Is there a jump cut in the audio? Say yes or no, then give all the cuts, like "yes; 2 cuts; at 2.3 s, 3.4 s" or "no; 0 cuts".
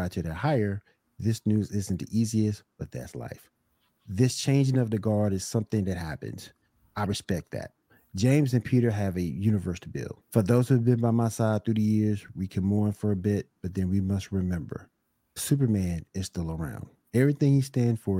yes; 1 cut; at 10.2 s